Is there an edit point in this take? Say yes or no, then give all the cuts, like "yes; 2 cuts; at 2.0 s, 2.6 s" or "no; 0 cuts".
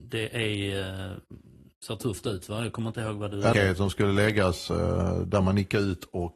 yes; 1 cut; at 3.5 s